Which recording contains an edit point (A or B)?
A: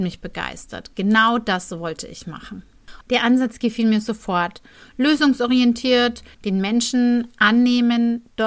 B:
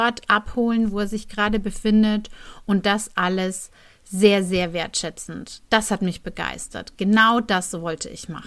A